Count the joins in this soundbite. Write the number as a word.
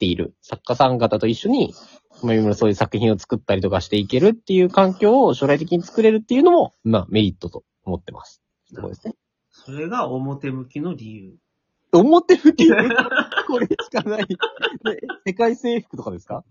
zero